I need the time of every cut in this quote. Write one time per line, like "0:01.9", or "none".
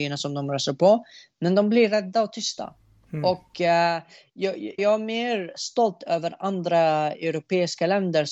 0:04.8